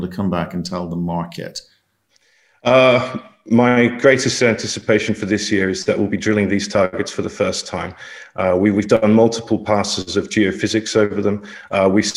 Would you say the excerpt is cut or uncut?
uncut